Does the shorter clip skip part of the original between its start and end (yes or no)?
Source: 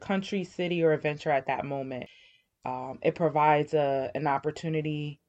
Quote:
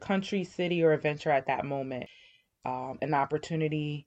yes